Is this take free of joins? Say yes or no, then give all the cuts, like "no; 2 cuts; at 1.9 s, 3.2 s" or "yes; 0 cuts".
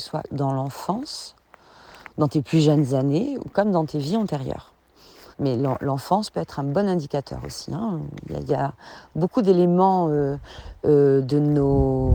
no; 1 cut; at 5.3 s